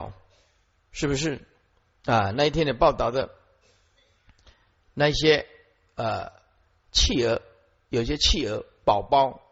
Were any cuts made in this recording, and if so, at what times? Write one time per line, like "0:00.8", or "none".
none